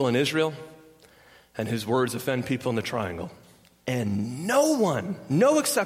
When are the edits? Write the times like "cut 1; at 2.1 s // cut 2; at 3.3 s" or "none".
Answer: cut 1; at 3.8 s

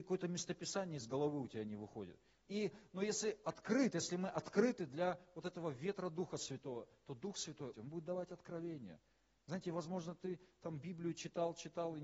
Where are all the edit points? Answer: cut 1; at 2.4 s // cut 2; at 7.7 s

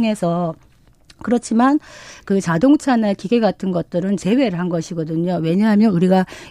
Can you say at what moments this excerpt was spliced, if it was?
none

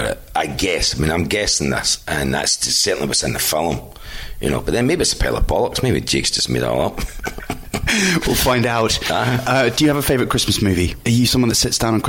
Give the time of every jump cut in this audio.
none

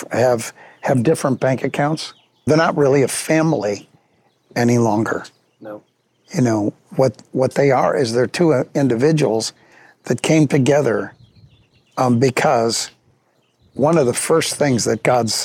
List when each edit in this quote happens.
cut 1; at 2.5 s

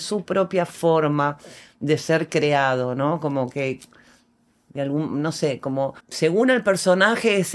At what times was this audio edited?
cut 1; at 6.0 s

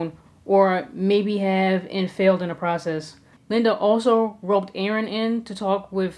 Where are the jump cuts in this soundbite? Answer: cut 1; at 3.4 s

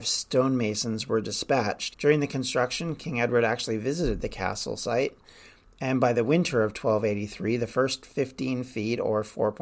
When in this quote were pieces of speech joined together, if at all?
cut 1; at 1.9 s

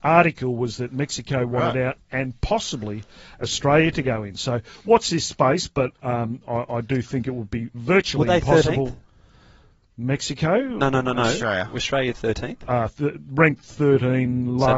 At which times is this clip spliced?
none

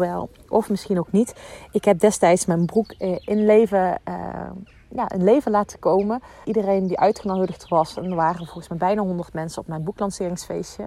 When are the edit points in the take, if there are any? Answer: cut 1; at 6.4 s

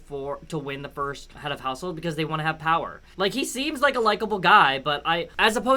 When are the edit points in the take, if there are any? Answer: cut 1; at 3.1 s

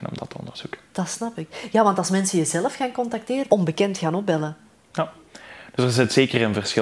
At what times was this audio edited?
cut 1; at 3.5 s

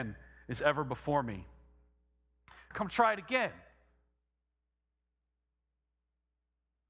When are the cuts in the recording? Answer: cut 1; at 2.7 s

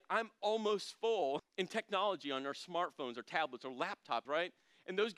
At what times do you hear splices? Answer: cut 1; at 1.4 s // cut 2; at 4.3 s

